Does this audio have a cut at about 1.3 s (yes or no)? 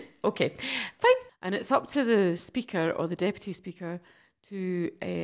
yes